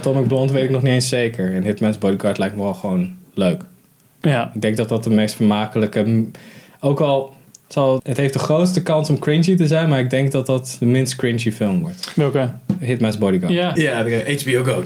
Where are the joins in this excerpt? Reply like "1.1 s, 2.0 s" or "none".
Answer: 8.0 s, 13.8 s